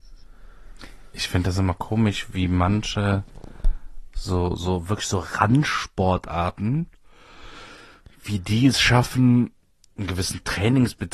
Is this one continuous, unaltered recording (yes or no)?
yes